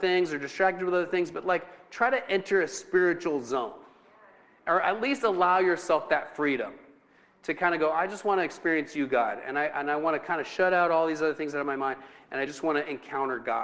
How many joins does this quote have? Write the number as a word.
zero